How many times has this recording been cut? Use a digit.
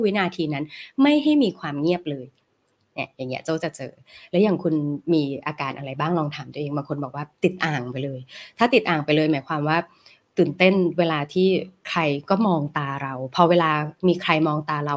0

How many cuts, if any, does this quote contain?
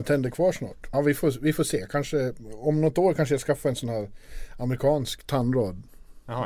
1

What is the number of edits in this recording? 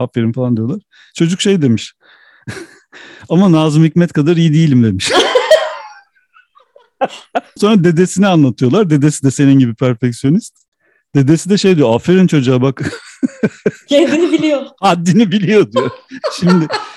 1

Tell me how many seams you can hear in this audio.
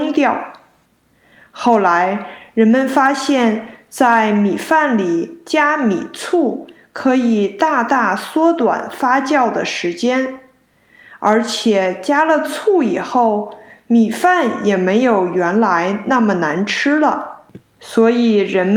0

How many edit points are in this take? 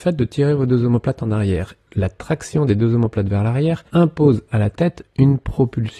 2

